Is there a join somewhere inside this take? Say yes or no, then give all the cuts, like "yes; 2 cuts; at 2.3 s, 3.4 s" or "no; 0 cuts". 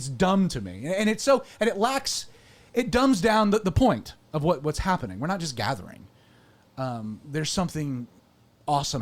no; 0 cuts